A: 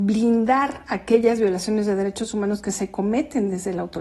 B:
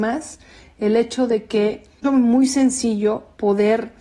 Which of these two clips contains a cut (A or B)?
B